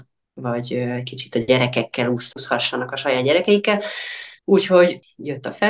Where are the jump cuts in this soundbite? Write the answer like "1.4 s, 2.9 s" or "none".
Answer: 4.4 s